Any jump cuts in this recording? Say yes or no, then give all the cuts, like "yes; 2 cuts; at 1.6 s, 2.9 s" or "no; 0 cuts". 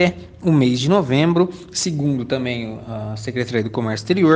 no; 0 cuts